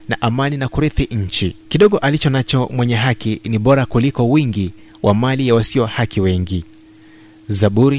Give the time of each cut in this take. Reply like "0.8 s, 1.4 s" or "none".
1.6 s